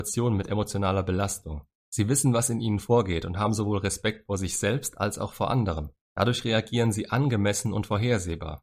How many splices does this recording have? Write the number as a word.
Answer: zero